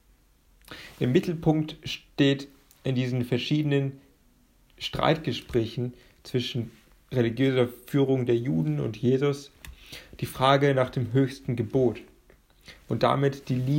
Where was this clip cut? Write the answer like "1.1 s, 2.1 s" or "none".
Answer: none